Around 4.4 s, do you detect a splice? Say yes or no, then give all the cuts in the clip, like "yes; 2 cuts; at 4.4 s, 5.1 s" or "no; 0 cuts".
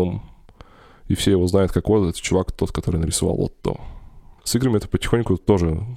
yes; 1 cut; at 4.4 s